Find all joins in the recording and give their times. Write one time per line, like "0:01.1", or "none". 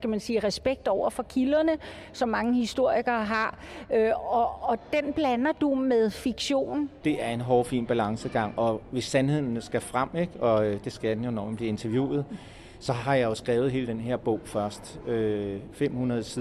0:07.0